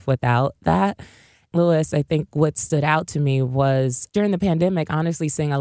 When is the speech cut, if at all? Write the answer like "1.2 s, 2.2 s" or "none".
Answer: 1.5 s, 4.1 s